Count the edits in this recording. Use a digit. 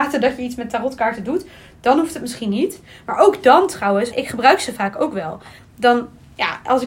2